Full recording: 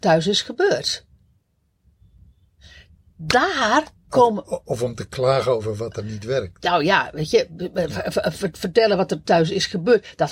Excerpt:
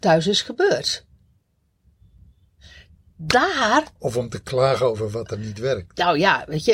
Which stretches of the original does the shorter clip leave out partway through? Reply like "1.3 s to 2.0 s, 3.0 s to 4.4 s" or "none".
4.0 s to 4.6 s